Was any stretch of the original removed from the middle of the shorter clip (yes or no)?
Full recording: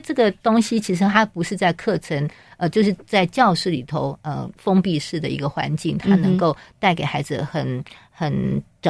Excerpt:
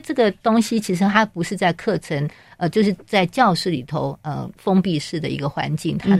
no